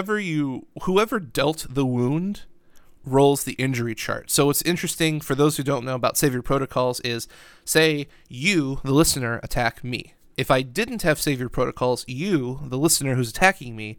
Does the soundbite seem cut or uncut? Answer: cut